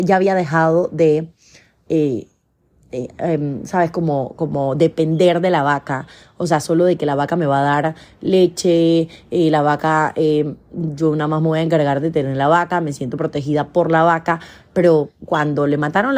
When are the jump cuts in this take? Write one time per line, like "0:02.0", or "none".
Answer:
none

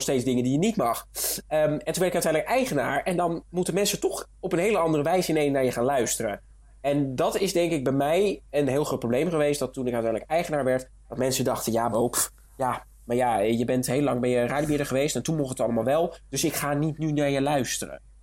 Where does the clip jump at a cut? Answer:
none

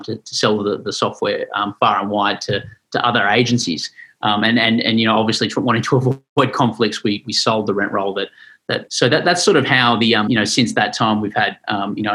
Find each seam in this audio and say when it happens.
0:08.9
0:10.3

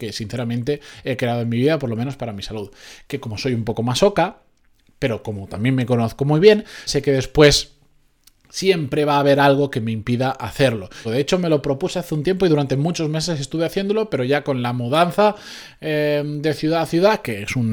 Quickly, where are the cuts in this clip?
0:03.0
0:06.9
0:11.0

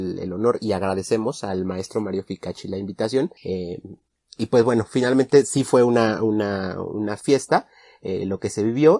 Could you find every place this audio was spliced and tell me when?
0:03.4

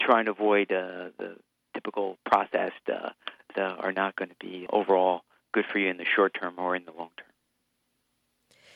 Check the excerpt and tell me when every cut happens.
0:03.5
0:04.7

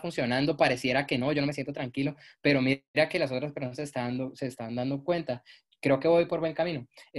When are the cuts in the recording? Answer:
none

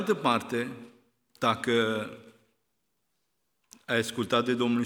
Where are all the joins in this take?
none

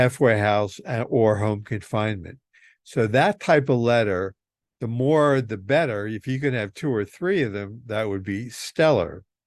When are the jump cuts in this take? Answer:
none

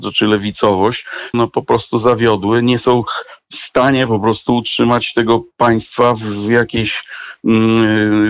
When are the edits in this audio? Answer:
0:01.3

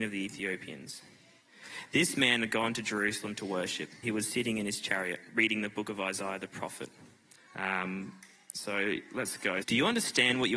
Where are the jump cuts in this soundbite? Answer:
0:04.0
0:07.5
0:09.6

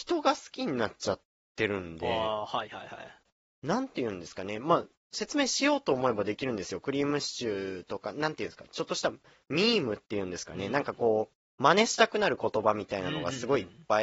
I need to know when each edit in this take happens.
none

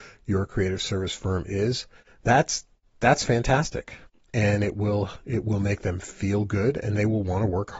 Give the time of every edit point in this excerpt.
none

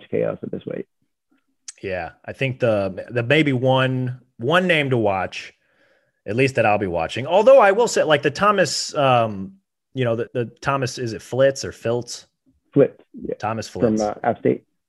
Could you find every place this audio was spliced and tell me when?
0:10.3

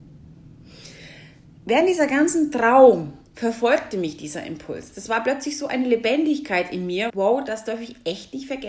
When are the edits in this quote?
0:07.1

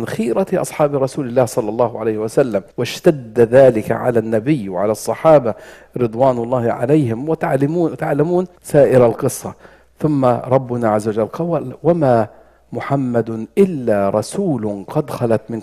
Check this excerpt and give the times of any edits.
0:02.7
0:08.6

